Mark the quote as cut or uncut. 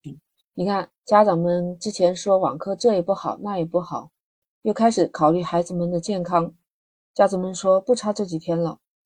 cut